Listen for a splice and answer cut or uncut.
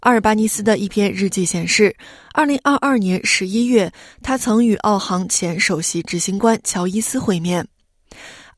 uncut